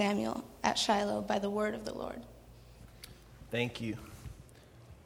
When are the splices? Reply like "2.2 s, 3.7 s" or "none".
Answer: none